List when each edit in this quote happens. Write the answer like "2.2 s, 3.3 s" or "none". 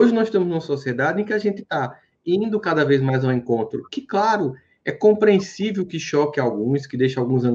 none